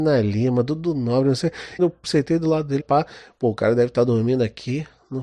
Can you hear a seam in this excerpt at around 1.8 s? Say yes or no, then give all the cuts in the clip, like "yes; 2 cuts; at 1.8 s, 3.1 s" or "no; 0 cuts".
yes; 2 cuts; at 1.8 s, 2.8 s